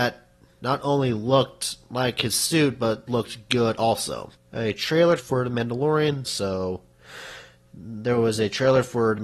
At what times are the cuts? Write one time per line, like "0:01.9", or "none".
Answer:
0:05.2
0:06.3